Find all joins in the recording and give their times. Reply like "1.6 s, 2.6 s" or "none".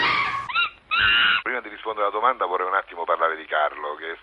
1.4 s

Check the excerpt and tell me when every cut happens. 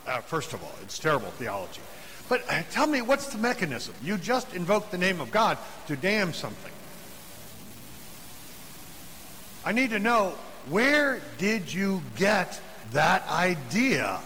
none

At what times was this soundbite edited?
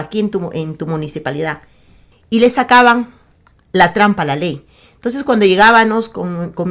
2.1 s

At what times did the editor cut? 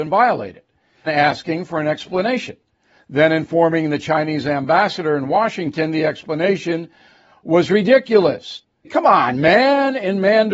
1.1 s, 8.8 s

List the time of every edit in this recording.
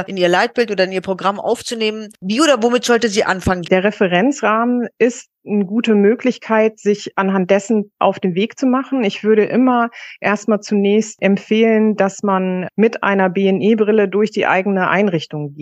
3.6 s

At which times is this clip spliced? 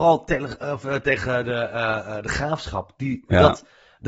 none

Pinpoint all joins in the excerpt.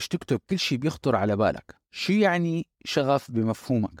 1.8 s

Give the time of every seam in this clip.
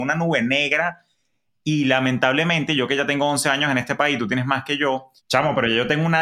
5.2 s

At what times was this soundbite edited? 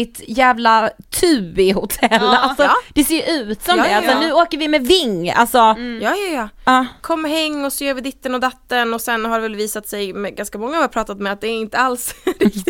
none

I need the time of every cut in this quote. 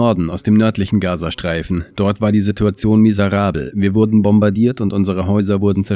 none

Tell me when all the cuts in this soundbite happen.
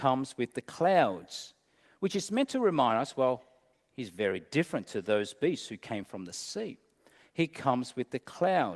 none

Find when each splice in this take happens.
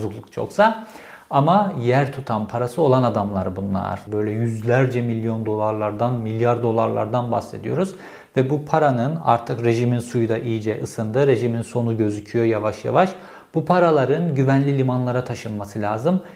4.1 s

